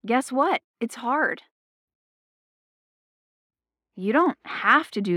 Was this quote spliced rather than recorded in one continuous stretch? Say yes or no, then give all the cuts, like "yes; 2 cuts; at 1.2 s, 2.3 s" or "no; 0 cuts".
no; 0 cuts